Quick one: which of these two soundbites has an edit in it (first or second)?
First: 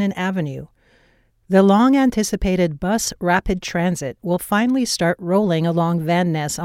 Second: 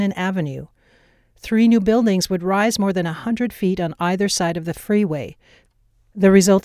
first